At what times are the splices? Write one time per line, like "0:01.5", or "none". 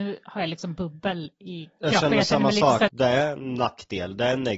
0:02.9